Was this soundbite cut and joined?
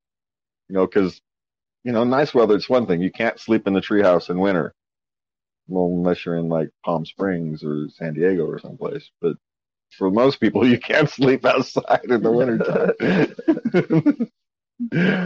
no; 0 cuts

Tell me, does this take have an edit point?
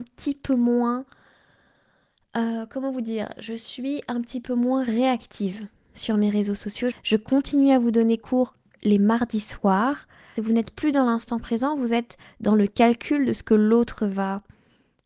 yes; 2 cuts; at 6.9 s, 10.4 s

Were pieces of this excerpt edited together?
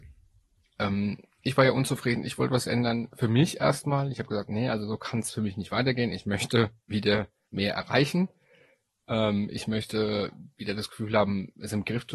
no; 0 cuts

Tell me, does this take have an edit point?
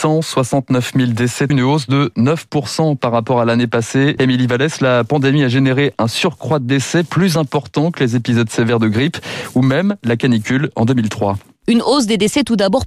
yes; 2 cuts; at 1.5 s, 4.2 s

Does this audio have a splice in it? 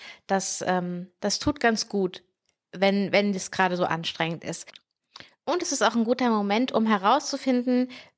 no; 0 cuts

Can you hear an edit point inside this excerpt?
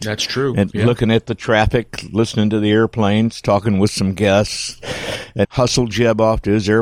yes; 1 cut; at 5.4 s

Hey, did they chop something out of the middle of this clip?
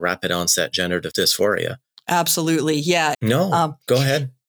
yes; 1 cut; at 3.1 s

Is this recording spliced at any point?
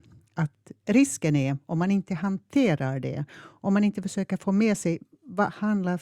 no; 0 cuts

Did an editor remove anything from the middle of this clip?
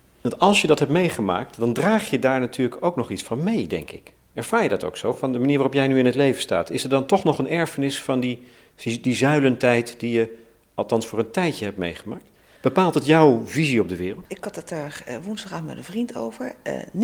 no; 0 cuts

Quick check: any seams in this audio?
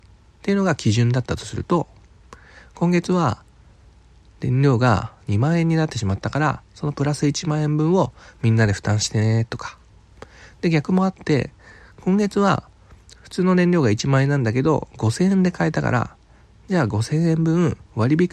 no; 0 cuts

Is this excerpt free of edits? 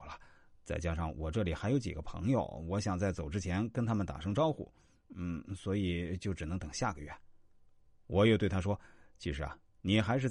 yes; 0 cuts

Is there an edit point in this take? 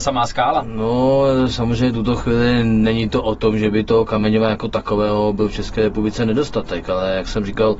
no; 0 cuts

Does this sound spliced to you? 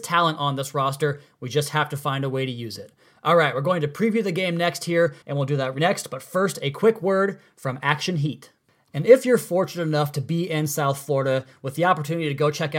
yes; 1 cut; at 5.2 s

